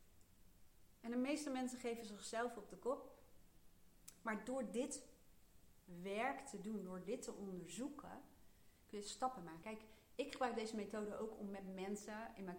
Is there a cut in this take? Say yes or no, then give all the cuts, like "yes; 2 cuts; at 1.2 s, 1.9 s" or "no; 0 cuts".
yes; 2 cuts; at 1.0 s, 9.6 s